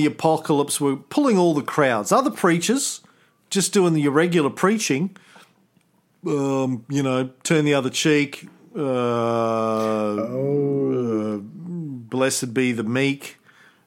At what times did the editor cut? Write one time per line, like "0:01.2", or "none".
none